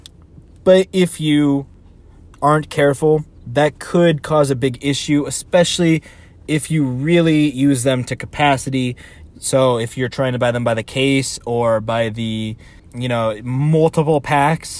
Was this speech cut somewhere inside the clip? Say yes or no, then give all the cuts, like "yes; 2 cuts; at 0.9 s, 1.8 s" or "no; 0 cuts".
yes; 2 cuts; at 9.3 s, 12.8 s